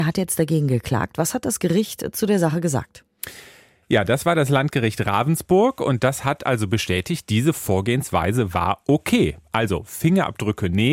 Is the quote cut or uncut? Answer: uncut